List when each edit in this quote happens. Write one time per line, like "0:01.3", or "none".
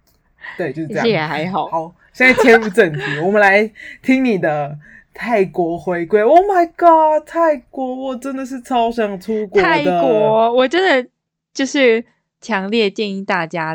none